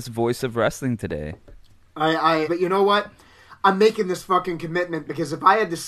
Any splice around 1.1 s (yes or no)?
no